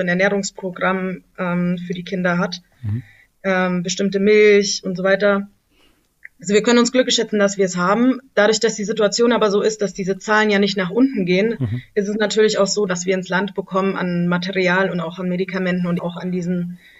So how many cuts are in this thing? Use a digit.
2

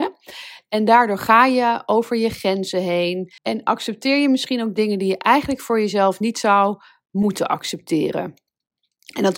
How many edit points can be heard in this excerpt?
1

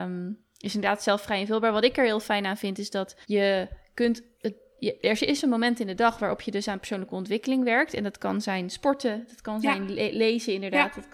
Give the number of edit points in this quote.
1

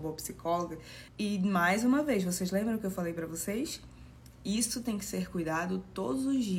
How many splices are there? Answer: 1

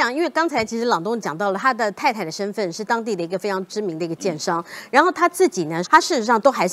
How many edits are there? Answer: 1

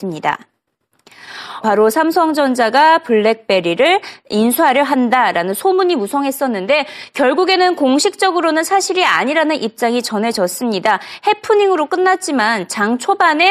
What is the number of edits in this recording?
1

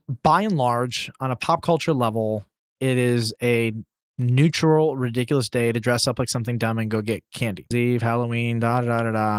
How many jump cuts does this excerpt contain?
1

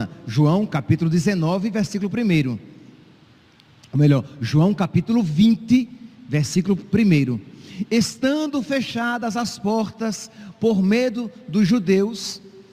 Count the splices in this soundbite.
0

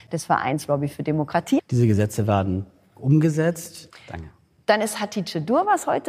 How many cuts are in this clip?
2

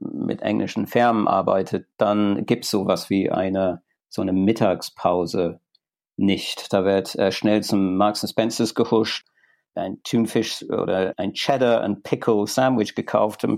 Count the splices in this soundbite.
0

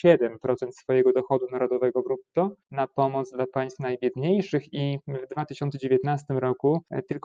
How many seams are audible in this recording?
0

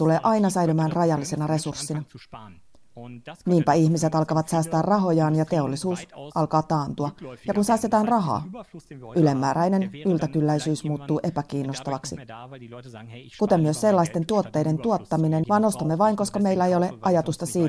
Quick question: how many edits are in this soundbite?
1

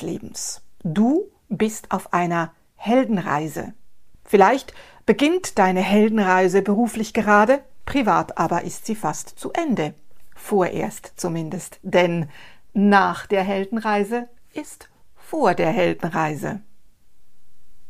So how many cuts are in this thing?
1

